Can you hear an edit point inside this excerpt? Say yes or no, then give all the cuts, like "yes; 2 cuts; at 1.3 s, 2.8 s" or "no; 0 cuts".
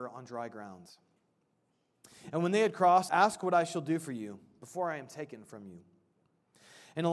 yes; 1 cut; at 3.1 s